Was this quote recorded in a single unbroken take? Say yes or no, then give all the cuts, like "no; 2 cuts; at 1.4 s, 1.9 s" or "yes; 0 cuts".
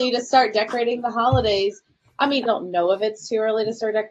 no; 1 cut; at 2.5 s